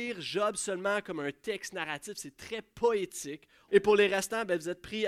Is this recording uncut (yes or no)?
no